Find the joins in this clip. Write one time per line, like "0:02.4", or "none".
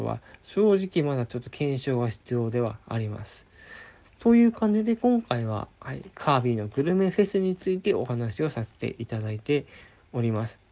0:04.0
0:05.8